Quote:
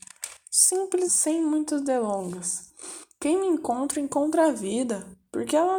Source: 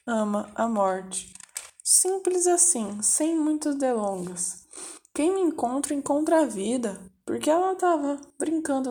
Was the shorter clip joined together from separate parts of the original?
yes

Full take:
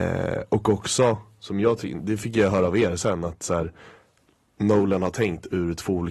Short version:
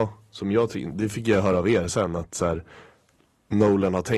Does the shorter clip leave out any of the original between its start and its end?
no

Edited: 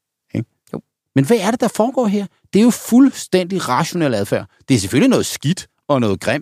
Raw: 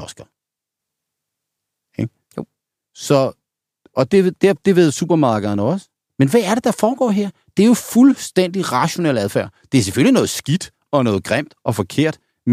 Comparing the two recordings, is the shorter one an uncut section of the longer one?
no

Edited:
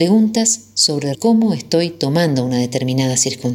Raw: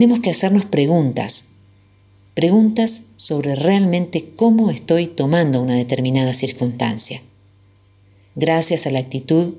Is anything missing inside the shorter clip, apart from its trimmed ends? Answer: yes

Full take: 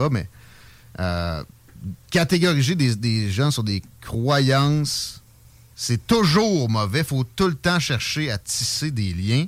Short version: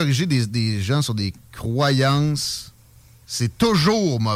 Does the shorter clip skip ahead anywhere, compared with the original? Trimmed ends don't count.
no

